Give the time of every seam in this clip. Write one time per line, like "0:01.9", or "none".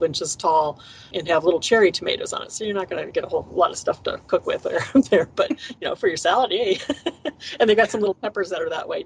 0:03.1